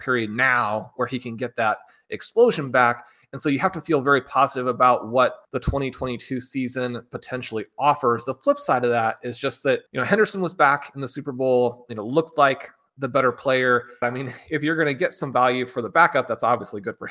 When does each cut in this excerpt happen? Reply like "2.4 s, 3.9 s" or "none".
5.4 s, 9.9 s, 14.0 s

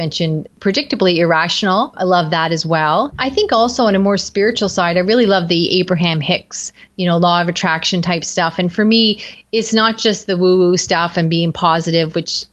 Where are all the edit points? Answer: none

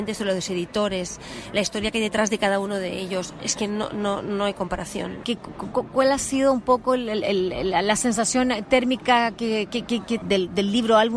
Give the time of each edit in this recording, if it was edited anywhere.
5.2 s, 10.2 s

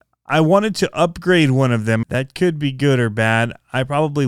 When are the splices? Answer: 2.0 s

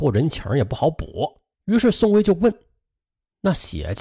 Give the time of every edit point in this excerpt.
1.5 s

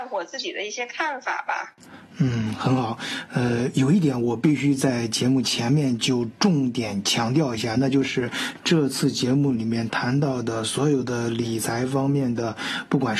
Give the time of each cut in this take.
none

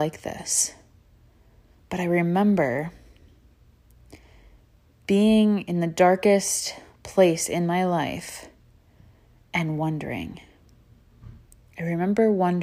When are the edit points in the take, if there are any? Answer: 1.8 s

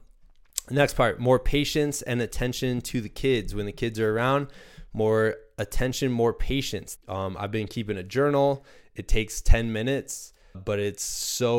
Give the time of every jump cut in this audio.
7.0 s, 10.5 s

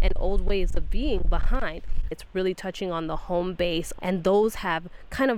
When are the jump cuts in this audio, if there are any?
2.1 s, 4.0 s

